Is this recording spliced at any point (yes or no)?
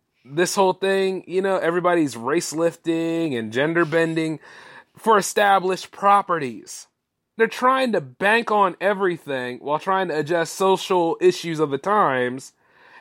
yes